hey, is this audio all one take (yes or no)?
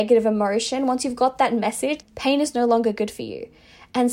no